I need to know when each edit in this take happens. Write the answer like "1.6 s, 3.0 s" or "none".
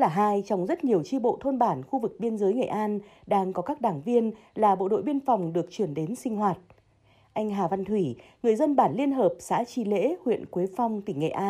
none